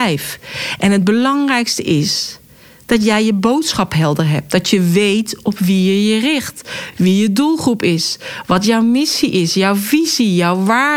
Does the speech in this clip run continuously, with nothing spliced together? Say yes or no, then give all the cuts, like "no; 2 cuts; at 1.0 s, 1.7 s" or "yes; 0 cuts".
yes; 0 cuts